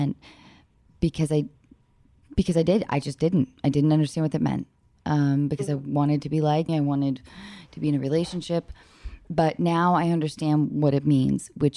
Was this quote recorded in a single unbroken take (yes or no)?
no